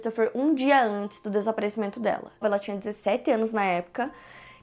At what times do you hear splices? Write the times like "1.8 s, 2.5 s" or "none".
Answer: 2.4 s